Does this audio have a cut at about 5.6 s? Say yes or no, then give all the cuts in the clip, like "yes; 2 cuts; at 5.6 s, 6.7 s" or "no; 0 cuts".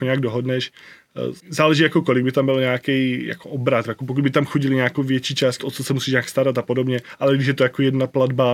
yes; 2 cuts; at 1.4 s, 5.6 s